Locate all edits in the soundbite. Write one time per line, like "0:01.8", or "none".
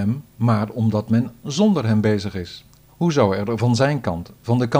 0:02.9